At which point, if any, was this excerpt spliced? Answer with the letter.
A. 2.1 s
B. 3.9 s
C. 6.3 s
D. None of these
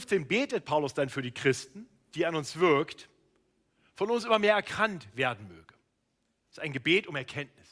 A